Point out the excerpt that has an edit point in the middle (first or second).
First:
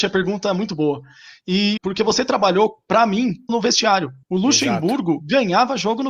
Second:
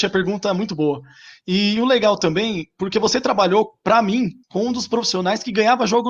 first